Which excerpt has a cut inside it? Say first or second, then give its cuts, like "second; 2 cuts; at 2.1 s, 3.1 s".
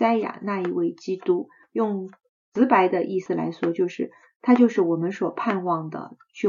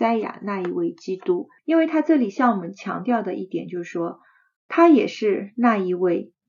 second; 2 cuts; at 1.6 s, 4.6 s